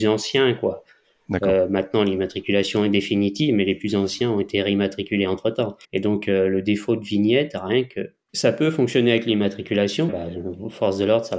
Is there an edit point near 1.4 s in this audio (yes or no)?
no